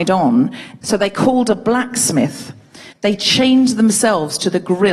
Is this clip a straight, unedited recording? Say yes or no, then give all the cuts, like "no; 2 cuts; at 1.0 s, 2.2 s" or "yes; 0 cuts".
no; 1 cut; at 2.9 s